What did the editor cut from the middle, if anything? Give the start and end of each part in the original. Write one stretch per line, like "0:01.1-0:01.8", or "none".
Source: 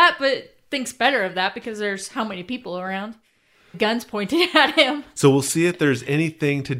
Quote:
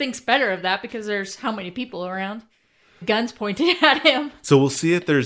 none